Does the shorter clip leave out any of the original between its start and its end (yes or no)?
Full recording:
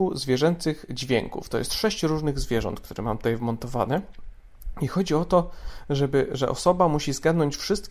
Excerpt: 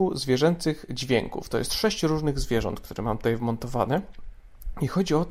no